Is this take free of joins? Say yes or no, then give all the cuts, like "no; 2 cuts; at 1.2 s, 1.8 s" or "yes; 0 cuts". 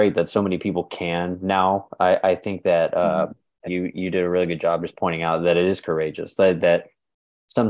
no; 2 cuts; at 3.7 s, 4.9 s